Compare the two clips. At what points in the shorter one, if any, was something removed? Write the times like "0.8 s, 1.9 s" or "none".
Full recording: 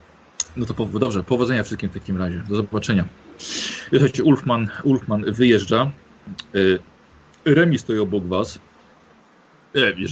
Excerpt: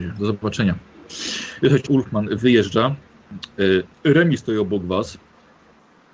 1.9 s, 3.9 s

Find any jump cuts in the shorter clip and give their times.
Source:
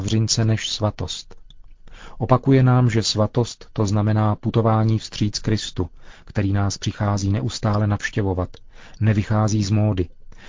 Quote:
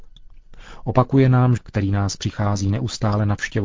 1.6 s

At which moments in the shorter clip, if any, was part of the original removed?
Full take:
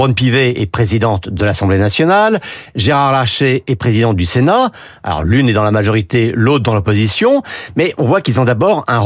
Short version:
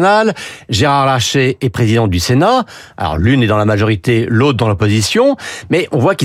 none

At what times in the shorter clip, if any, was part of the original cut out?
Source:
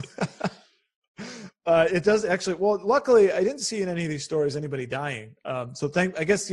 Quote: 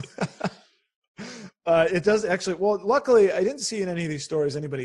none

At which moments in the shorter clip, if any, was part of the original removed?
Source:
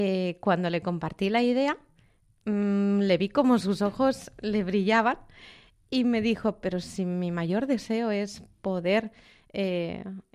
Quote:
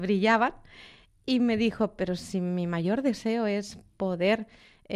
none

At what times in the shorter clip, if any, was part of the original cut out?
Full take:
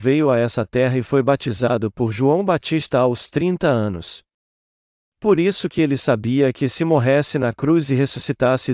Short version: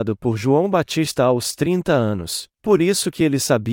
2.5 s

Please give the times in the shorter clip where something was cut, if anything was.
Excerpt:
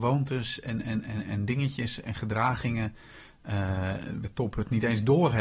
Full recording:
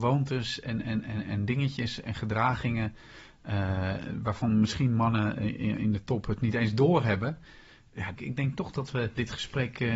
4.2 s

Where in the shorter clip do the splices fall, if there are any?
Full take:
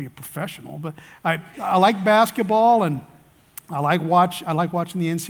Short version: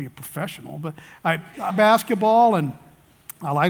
1.7 s

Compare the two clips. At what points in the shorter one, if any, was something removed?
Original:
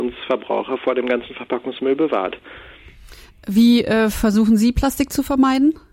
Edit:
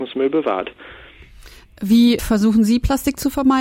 2.2 s

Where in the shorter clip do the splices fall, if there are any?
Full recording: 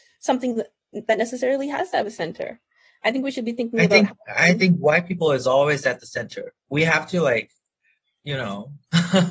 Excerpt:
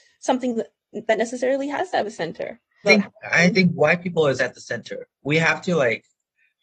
2.8 s, 4.4 s

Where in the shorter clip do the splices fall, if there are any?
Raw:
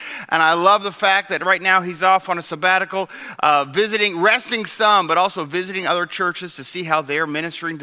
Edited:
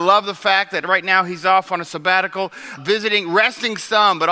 2.8 s

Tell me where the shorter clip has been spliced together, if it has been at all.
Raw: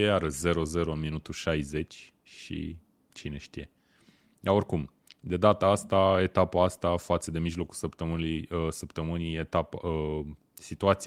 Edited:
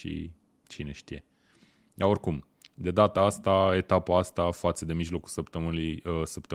none

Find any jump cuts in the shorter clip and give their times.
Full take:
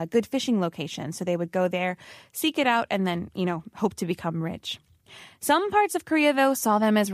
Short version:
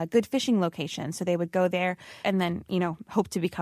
2.2 s

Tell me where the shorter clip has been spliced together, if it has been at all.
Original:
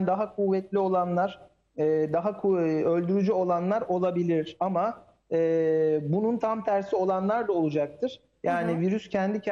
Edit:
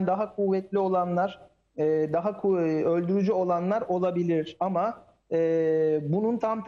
none

